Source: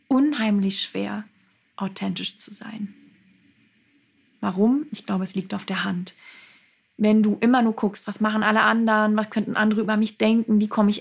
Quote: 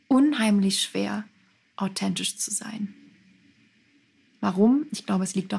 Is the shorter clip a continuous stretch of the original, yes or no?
yes